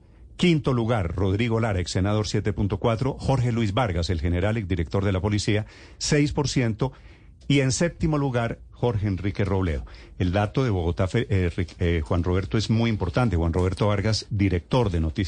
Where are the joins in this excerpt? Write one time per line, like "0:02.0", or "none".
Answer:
none